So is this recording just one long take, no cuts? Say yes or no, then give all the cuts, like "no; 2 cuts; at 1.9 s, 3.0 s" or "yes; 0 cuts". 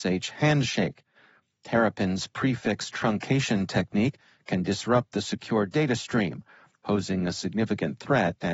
yes; 0 cuts